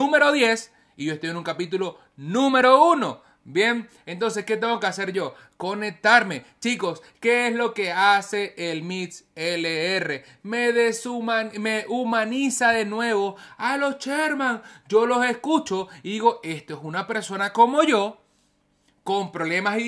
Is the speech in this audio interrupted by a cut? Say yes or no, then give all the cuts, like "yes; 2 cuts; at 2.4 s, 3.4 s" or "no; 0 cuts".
no; 0 cuts